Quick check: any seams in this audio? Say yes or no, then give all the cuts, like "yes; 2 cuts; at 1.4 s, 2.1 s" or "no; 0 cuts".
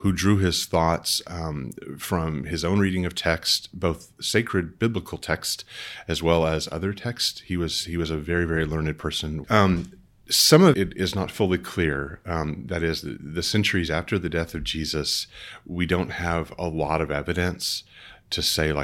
yes; 2 cuts; at 9.4 s, 10.7 s